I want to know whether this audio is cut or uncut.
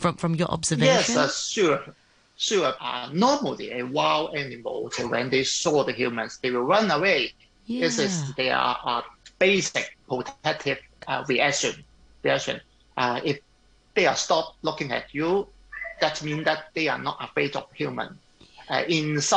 cut